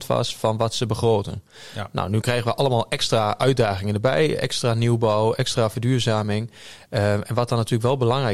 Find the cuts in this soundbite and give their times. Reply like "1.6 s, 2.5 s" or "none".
none